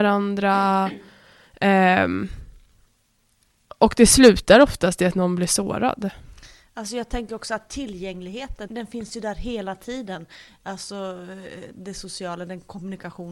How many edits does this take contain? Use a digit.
1